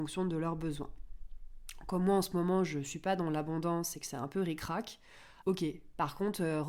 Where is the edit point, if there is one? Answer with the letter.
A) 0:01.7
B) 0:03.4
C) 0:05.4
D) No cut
C